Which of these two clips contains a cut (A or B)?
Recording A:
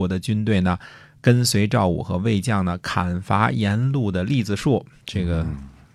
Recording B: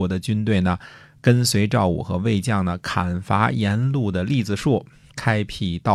A